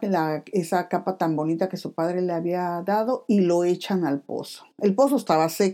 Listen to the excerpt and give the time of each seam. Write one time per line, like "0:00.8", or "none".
none